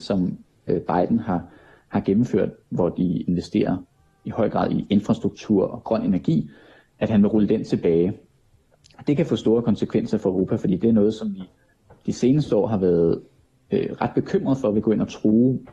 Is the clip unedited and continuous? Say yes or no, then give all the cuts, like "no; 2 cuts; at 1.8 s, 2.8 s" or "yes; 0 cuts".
yes; 0 cuts